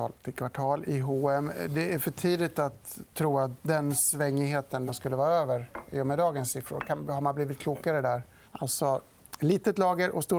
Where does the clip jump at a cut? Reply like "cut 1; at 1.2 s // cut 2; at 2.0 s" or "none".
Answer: cut 1; at 4.9 s // cut 2; at 8.4 s